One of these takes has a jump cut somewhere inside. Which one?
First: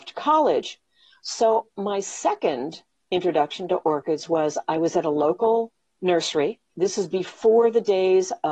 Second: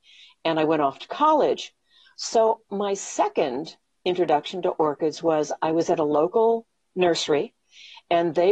first; 1 cut; at 6.7 s

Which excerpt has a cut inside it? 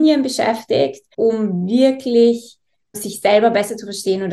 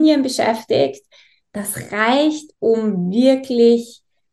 first; 2 cuts; at 1.1 s, 2.9 s

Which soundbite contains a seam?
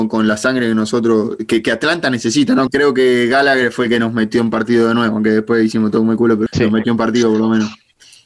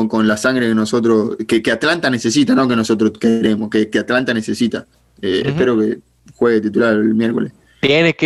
first; 2 cuts; at 2.7 s, 6.5 s

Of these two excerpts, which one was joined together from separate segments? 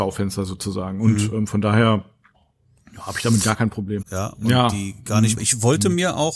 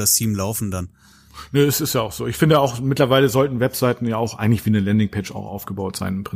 first; 2 cuts; at 4.0 s, 5.4 s

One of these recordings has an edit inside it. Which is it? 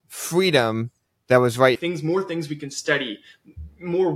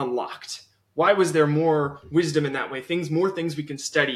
first; 1 cut; at 1.7 s

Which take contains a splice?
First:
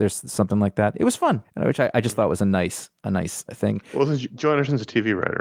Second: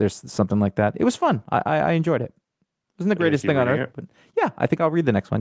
first; 2 cuts; at 1.4 s, 3.5 s

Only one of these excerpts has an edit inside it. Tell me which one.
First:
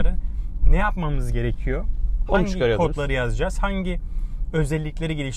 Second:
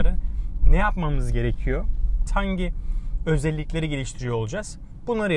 second; 1 cut; at 2.3 s

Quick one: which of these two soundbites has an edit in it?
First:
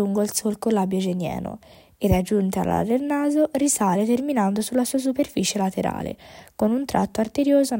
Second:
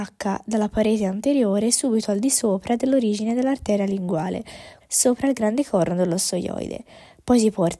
second; 1 cut; at 4.8 s

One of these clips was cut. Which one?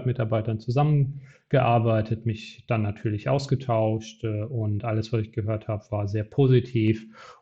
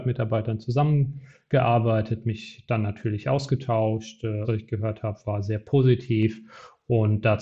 second; 1 cut; at 4.4 s

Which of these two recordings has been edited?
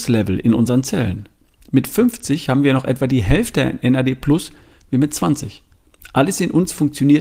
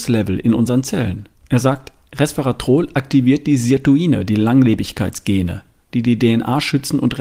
second; 2 cuts; at 1.3 s, 5.9 s

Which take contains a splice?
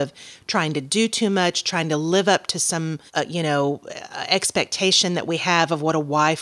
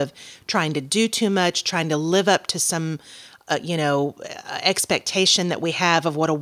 first; 1 cut; at 3.1 s

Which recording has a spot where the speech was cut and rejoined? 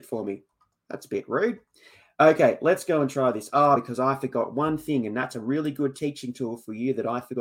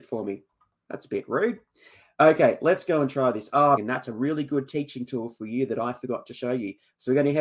second; 1 cut; at 3.8 s

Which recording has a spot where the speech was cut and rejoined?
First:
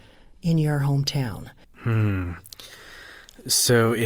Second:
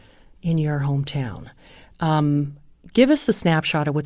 first; 1 cut; at 1.6 s

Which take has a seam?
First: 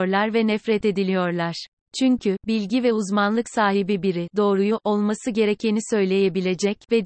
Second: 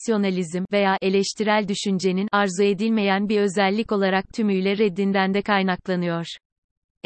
first; 1 cut; at 1.8 s

